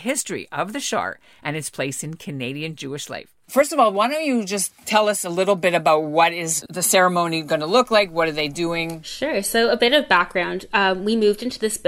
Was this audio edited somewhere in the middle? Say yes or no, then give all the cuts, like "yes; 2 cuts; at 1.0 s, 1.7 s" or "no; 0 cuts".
no; 0 cuts